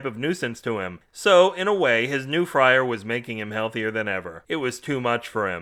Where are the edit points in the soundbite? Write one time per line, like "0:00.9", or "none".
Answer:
0:01.1
0:04.4